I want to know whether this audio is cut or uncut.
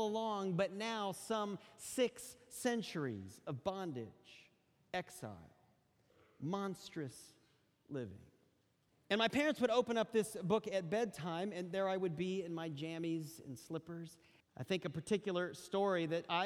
cut